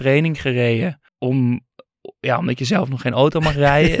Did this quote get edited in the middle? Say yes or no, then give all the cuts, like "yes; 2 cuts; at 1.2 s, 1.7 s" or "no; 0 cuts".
yes; 1 cut; at 1.1 s